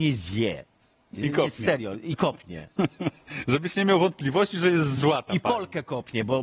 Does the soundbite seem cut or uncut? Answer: uncut